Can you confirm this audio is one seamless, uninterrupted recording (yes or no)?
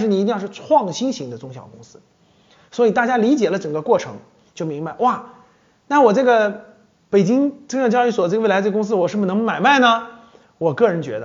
yes